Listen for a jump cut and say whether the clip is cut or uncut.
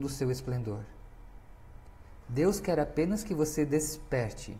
cut